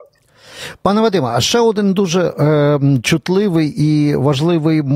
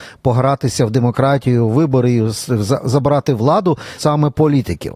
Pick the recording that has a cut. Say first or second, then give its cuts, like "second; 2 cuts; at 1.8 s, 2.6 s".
second; 1 cut; at 4.0 s